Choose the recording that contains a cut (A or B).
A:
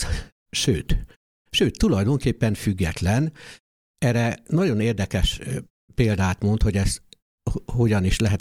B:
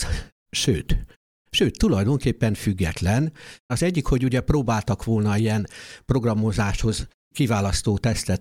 B